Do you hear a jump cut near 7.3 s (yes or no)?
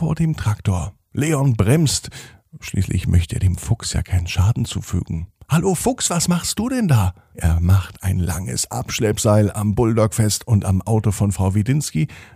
yes